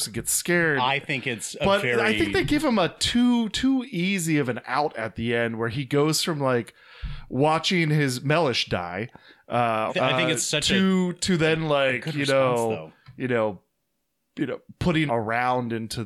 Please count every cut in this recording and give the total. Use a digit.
2